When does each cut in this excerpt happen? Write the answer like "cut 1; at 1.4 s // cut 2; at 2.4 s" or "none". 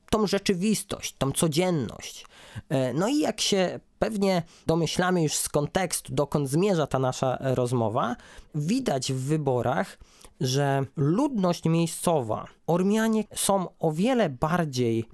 cut 1; at 6.9 s // cut 2; at 13.3 s

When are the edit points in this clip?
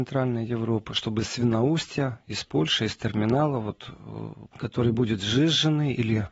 cut 1; at 4.5 s

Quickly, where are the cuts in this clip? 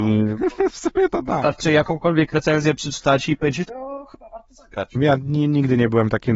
cut 1; at 3.7 s // cut 2; at 5.0 s

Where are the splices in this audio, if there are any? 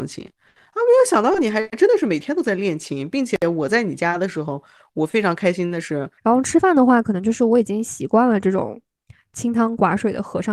cut 1; at 6.2 s

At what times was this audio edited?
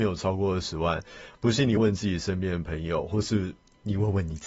cut 1; at 1.8 s

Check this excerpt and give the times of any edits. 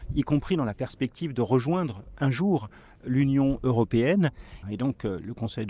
cut 1; at 4.6 s

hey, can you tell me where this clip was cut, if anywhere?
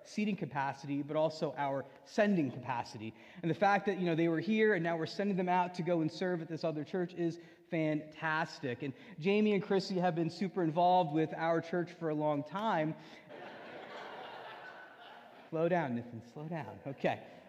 cut 1; at 13.3 s // cut 2; at 15.5 s

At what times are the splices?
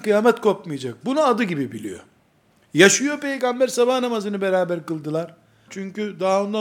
cut 1; at 5.7 s

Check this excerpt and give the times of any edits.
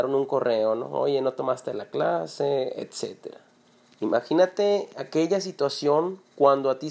cut 1; at 3.8 s

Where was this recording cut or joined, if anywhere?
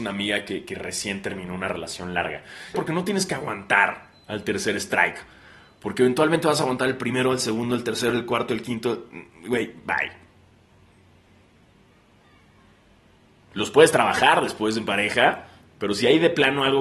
cut 1; at 2.7 s

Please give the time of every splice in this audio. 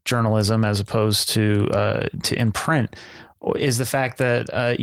none

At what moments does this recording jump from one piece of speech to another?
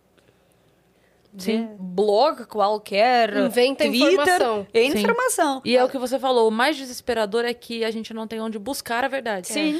cut 1; at 1.8 s // cut 2; at 5.6 s

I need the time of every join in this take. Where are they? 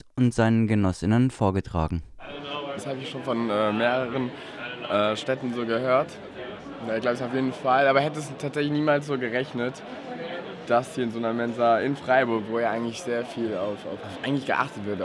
cut 1; at 2.8 s // cut 2; at 14.0 s

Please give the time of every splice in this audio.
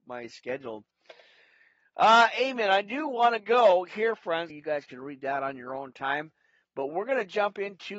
cut 1; at 4.5 s

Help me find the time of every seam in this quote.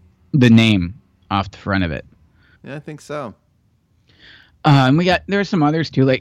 cut 1; at 2.6 s

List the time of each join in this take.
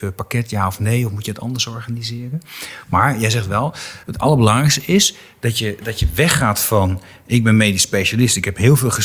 none

